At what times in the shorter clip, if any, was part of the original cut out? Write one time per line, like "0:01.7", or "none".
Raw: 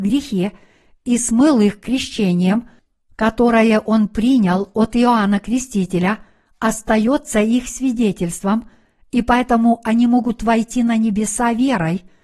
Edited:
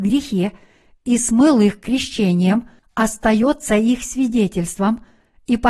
0:02.8